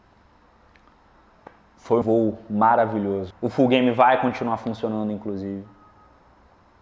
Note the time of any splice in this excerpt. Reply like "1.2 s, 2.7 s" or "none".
2.0 s, 3.3 s